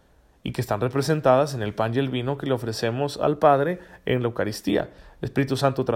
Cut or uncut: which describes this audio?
uncut